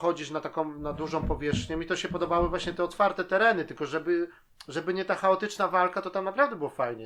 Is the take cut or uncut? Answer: uncut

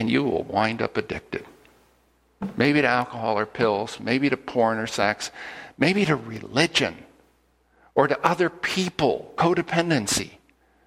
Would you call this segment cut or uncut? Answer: uncut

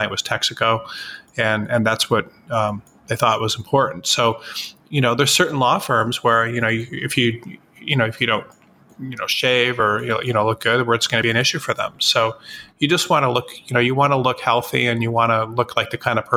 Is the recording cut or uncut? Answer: uncut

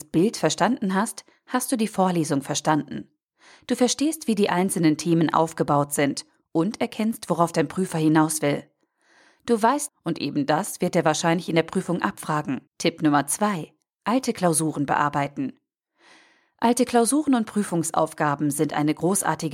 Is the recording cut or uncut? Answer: cut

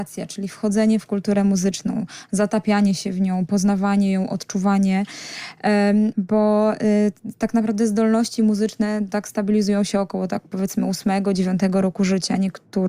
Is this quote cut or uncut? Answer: cut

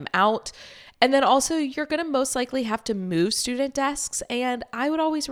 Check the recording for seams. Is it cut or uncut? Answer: uncut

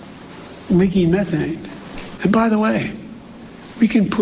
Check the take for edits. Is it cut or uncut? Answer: cut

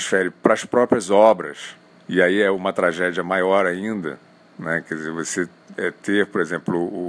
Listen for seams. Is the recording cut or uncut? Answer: uncut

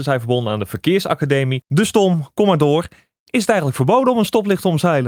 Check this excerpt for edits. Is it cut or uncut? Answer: cut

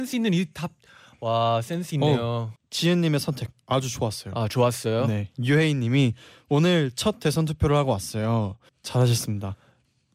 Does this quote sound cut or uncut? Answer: cut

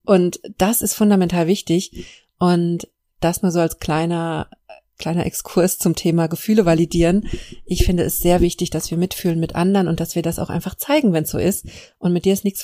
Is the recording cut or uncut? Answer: uncut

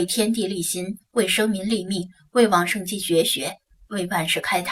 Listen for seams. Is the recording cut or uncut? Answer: uncut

